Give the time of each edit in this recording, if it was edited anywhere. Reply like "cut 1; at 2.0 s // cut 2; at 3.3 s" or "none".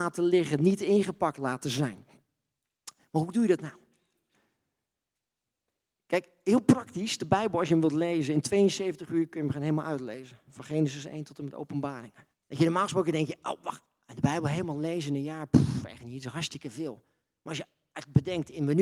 cut 1; at 12.3 s

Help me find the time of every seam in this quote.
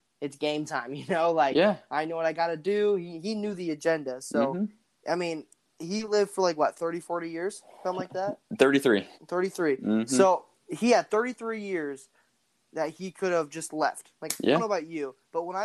cut 1; at 9.1 s

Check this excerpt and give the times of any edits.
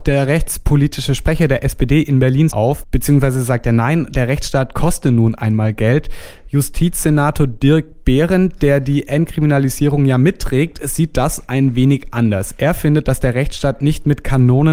cut 1; at 2.5 s

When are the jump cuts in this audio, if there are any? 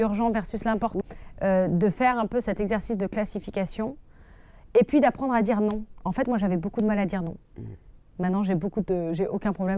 cut 1; at 1.0 s

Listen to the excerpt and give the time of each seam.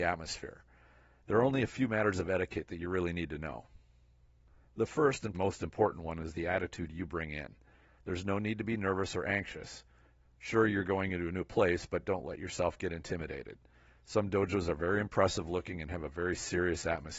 cut 1; at 5.3 s

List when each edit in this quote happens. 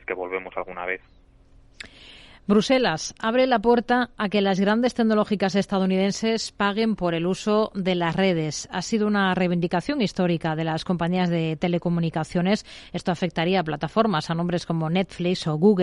none

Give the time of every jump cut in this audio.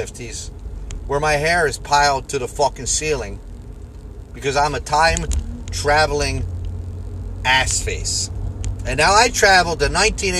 none

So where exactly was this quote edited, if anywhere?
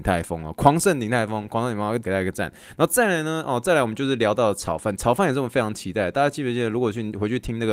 cut 1; at 2.0 s

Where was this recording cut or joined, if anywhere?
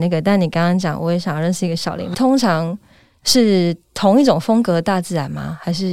cut 1; at 2.1 s

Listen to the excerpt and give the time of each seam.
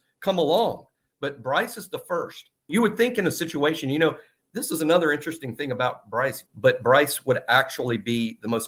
cut 1; at 2.7 s // cut 2; at 6.4 s

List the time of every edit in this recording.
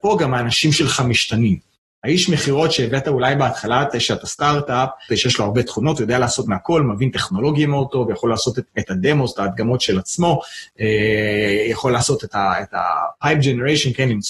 cut 1; at 5.1 s // cut 2; at 8.7 s

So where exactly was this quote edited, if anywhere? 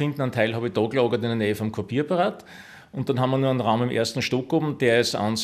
none

